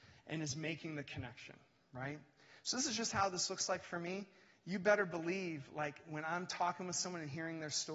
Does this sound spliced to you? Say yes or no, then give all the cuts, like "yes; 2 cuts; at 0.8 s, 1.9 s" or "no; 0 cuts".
no; 0 cuts